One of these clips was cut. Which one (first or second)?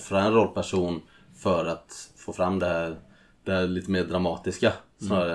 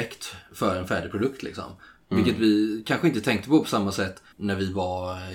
second